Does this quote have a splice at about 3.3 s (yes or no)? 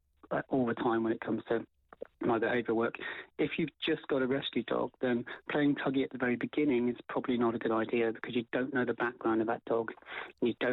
no